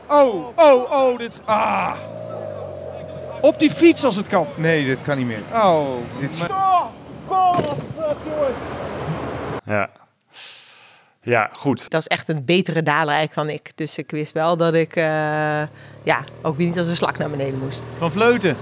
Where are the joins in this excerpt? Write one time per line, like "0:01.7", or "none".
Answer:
0:06.5
0:09.6
0:11.9